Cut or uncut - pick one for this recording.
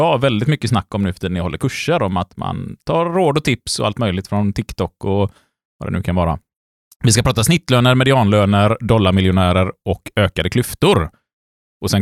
cut